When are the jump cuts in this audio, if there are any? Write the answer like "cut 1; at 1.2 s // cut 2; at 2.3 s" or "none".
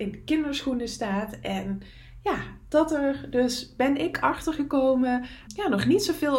cut 1; at 5.5 s

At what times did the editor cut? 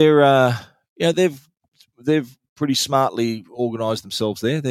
cut 1; at 1.1 s

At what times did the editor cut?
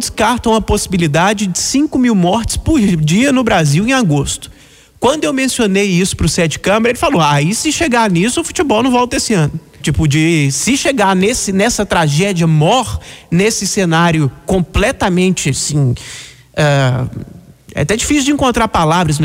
cut 1; at 9.8 s

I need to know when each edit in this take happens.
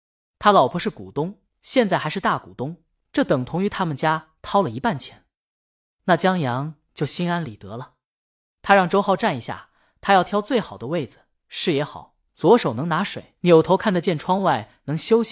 cut 1; at 12.3 s // cut 2; at 13.4 s

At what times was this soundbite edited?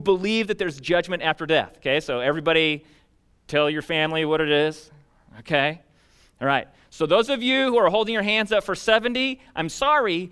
none

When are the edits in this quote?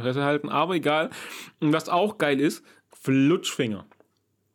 cut 1; at 2.9 s

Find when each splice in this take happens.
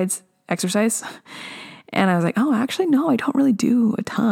none

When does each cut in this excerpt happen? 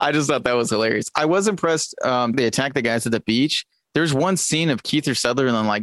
cut 1; at 2.3 s

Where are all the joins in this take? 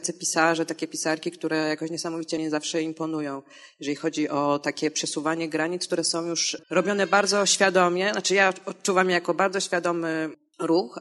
cut 1; at 6.6 s

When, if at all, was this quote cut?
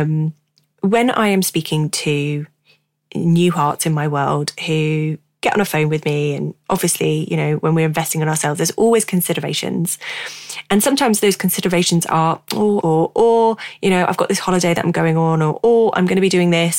cut 1; at 12.8 s

